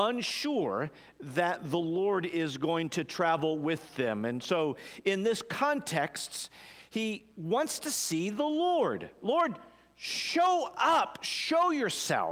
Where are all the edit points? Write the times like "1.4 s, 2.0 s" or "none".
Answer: none